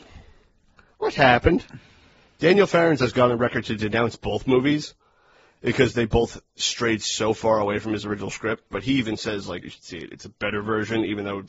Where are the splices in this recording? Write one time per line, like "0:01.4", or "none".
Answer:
0:09.6